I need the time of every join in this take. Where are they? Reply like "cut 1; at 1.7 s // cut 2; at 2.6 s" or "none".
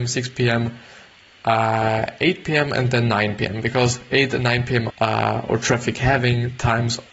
cut 1; at 4.9 s